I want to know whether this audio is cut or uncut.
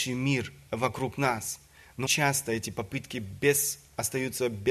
cut